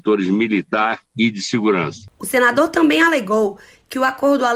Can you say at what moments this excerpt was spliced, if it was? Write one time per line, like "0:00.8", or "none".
0:02.1